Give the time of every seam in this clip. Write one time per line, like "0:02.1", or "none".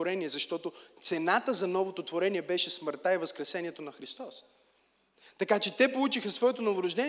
none